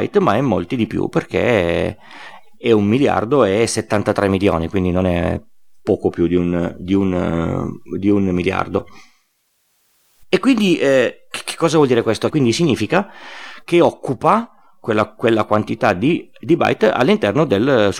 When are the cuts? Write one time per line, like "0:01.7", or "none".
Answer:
0:12.3